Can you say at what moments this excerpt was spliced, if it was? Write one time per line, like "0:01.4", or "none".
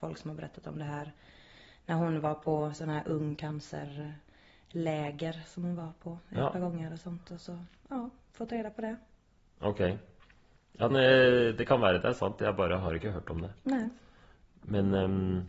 0:10.9